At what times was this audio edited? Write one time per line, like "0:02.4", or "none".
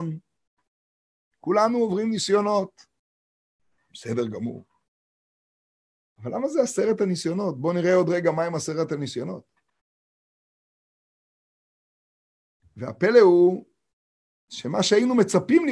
0:03.9